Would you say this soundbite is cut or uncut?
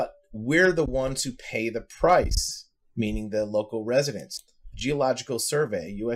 cut